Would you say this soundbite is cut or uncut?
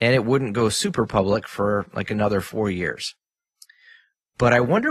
uncut